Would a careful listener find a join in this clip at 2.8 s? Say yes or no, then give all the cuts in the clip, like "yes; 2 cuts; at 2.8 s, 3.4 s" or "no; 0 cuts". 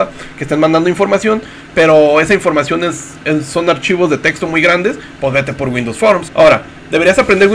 no; 1 cut; at 6.3 s